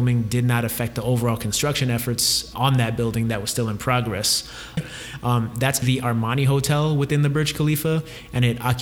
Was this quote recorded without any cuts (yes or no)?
no